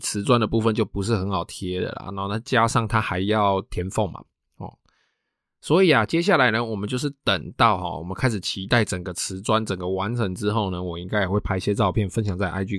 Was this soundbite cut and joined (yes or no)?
no